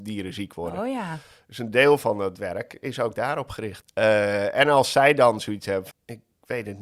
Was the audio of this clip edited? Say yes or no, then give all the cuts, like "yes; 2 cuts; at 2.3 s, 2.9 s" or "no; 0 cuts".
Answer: yes; 2 cuts; at 3.8 s, 5.9 s